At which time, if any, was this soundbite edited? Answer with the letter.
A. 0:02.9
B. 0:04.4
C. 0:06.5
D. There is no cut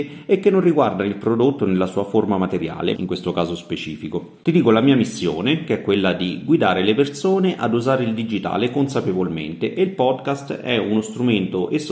A